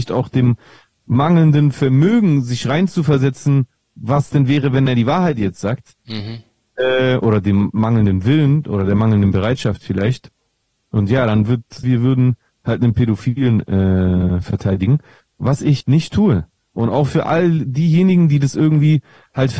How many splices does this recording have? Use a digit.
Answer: 2